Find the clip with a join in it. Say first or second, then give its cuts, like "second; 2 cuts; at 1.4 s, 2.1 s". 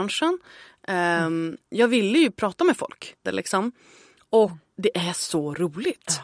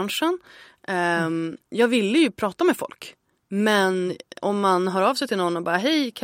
first; 2 cuts; at 3.3 s, 4.7 s